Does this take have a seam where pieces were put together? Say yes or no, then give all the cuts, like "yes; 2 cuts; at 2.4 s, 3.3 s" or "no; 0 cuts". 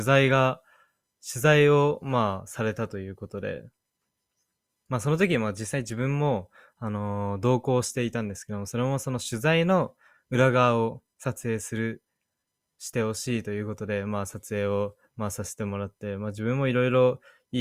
no; 0 cuts